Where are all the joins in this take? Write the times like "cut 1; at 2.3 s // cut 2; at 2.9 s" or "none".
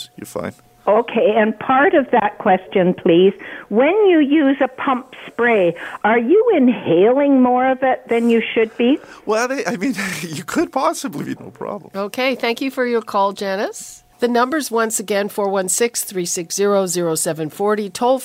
cut 1; at 11.4 s // cut 2; at 14.1 s